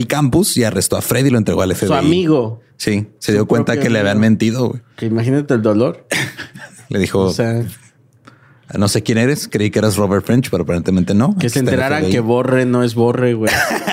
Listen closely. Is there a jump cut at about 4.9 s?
yes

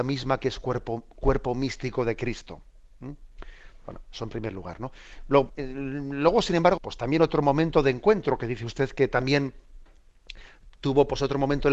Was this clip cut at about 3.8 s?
no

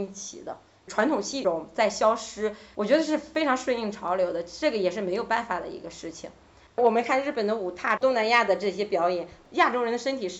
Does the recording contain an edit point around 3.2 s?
no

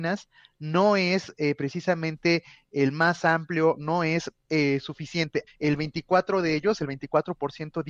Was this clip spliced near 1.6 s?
no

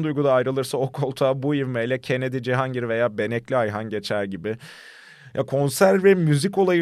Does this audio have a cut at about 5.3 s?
no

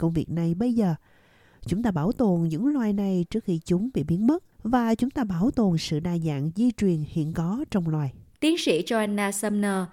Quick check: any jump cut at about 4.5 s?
yes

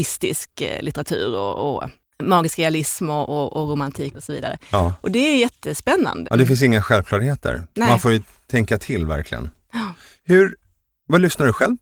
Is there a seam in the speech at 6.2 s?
yes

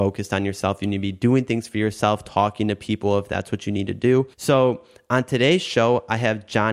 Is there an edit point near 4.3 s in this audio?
yes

